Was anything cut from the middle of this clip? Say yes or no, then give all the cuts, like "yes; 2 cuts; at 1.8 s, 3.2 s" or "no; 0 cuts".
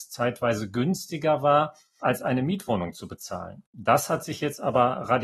yes; 1 cut; at 2.0 s